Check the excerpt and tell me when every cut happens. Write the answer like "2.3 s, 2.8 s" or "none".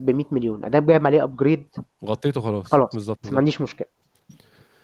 3.2 s